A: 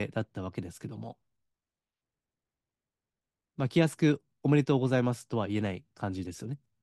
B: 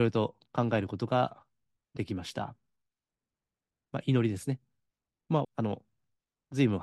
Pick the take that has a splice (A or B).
B